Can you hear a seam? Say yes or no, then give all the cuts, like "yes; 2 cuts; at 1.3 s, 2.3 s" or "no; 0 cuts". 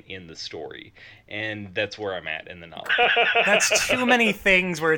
yes; 1 cut; at 2.9 s